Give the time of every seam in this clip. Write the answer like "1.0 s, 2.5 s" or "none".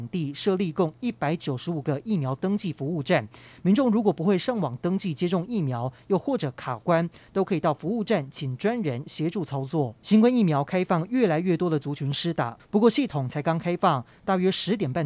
10.0 s, 12.6 s